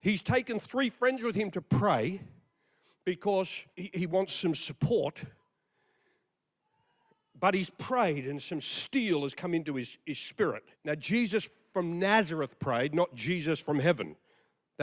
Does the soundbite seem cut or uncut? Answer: cut